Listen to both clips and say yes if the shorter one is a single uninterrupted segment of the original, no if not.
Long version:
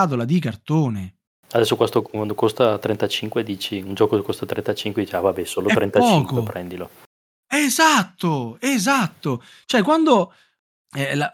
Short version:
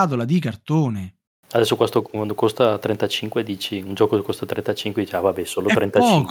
yes